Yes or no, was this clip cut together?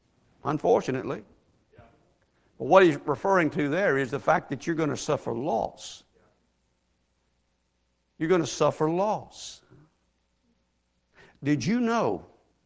no